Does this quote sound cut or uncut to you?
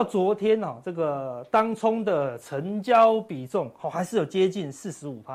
uncut